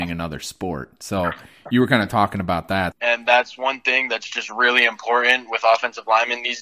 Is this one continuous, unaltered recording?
no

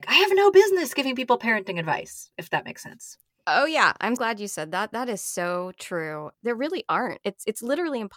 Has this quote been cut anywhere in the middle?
yes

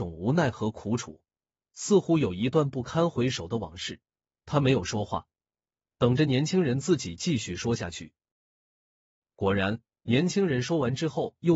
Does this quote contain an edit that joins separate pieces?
no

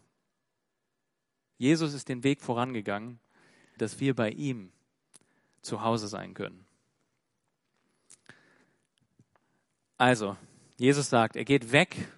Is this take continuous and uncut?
no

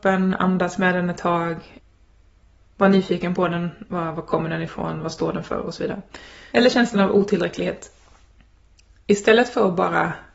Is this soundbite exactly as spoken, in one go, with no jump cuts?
no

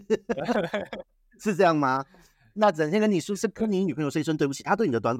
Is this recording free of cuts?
yes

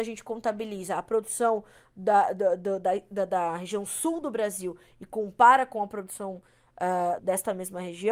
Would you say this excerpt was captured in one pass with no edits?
no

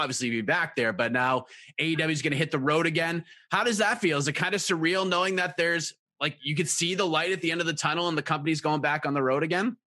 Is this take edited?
no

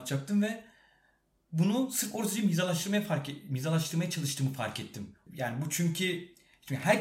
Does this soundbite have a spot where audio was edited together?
yes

